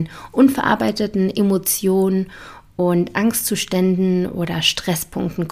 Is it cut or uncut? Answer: uncut